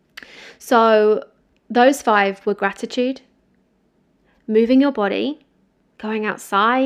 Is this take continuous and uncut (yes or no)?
yes